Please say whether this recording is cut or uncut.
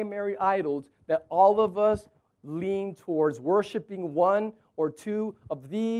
uncut